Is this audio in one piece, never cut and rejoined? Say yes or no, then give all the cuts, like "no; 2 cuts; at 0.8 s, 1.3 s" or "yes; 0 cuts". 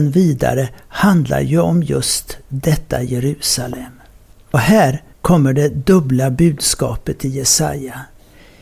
no; 1 cut; at 4.3 s